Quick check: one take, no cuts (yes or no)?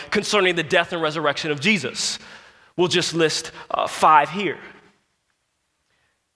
yes